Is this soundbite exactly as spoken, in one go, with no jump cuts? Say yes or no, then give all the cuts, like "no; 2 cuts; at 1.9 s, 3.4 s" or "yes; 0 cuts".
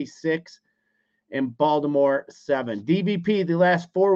yes; 0 cuts